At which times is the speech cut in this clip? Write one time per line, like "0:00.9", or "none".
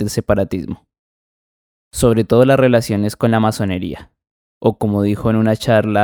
0:01.8